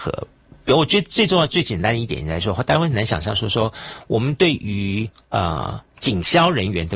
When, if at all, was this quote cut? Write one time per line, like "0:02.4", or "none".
none